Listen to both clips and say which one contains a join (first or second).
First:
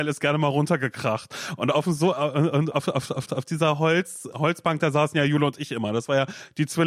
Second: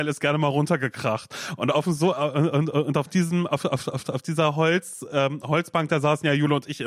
first